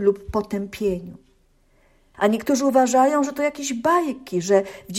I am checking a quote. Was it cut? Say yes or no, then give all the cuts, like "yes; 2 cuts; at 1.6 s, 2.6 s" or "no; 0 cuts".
yes; 1 cut; at 2.1 s